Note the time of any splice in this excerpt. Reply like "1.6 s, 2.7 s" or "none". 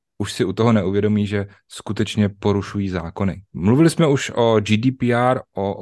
3.5 s